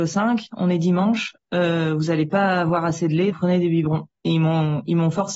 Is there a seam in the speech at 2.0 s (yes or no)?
no